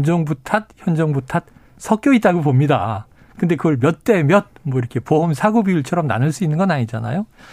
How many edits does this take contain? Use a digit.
0